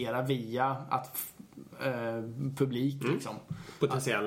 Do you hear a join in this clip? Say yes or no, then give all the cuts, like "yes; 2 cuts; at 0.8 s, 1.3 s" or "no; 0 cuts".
no; 0 cuts